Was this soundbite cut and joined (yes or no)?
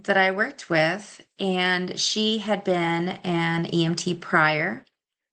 no